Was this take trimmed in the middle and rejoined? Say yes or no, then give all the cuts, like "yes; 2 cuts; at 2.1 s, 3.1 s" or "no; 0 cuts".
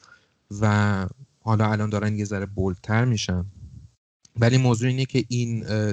no; 0 cuts